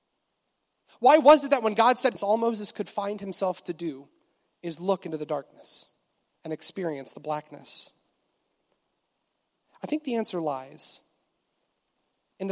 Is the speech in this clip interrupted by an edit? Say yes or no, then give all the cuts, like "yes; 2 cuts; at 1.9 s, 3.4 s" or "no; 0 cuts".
yes; 1 cut; at 2.1 s